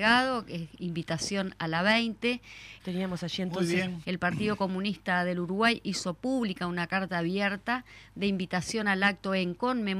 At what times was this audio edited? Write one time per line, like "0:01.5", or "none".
0:02.8
0:04.0